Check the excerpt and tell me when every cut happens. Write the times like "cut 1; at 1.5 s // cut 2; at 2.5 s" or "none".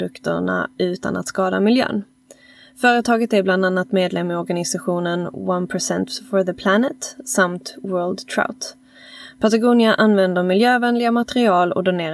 none